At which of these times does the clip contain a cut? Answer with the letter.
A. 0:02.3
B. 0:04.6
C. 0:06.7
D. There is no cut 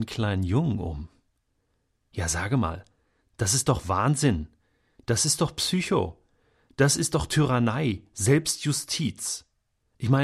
D